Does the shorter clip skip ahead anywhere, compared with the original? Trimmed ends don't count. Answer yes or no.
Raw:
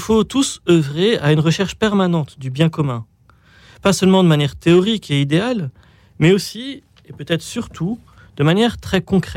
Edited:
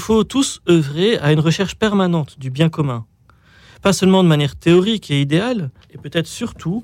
yes